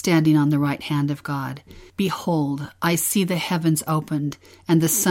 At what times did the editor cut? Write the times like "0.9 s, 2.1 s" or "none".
1.9 s